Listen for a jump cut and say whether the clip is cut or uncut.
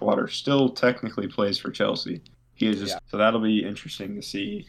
cut